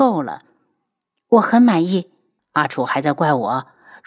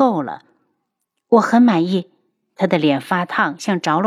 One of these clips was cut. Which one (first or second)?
first